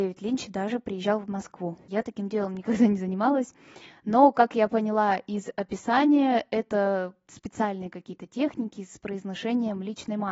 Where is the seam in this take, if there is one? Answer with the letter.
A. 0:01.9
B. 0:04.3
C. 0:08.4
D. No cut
A